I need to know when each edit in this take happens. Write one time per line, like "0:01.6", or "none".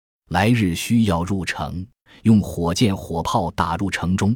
0:02.1